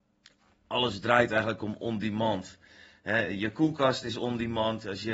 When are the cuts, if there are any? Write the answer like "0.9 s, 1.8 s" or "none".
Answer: none